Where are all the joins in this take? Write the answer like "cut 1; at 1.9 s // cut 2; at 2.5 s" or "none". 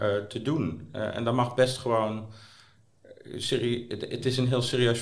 none